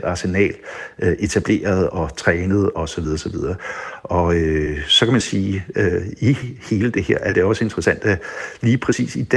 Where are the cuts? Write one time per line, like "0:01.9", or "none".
none